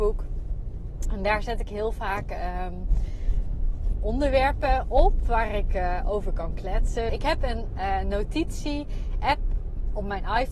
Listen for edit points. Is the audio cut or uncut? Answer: cut